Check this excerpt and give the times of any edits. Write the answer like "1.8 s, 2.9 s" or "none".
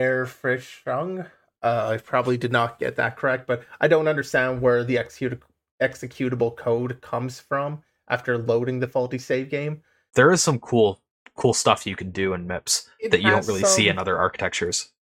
10.1 s